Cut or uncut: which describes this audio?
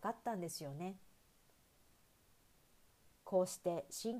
cut